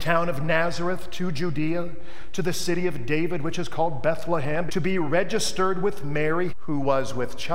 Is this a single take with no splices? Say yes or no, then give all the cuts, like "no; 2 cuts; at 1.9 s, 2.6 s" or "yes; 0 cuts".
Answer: no; 2 cuts; at 4.7 s, 6.5 s